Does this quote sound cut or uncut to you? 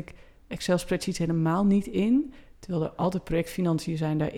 uncut